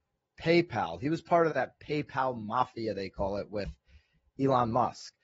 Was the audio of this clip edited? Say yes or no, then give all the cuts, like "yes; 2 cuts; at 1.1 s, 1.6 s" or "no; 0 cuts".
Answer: yes; 1 cut; at 1.5 s